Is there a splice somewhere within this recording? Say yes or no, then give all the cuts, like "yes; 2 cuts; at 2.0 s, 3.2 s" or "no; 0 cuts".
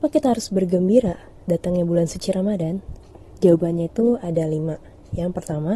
no; 0 cuts